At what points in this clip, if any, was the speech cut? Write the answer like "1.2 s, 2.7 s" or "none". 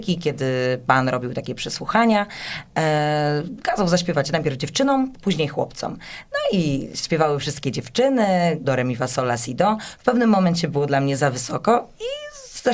5.1 s, 8.6 s

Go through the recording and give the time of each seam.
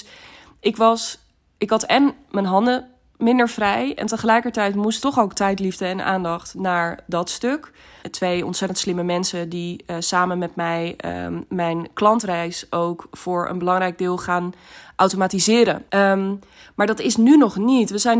5.0 s, 8.0 s, 15.9 s

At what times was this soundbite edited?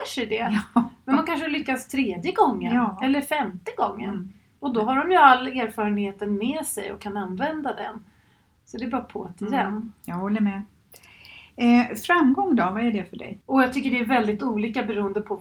13.4 s

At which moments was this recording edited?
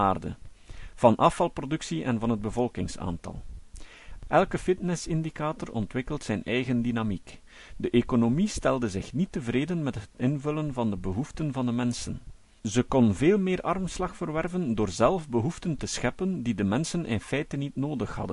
7.7 s

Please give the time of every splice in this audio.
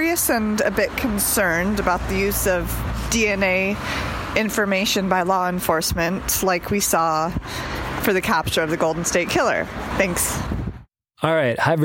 9.9 s

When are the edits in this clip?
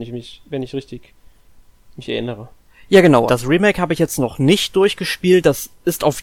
3.3 s

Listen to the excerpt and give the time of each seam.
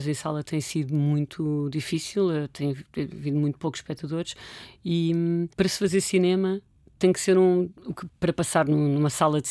5.5 s, 8.1 s

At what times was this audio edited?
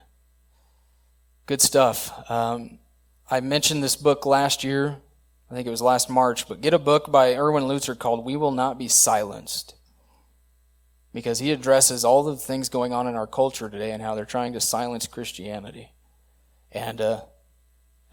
none

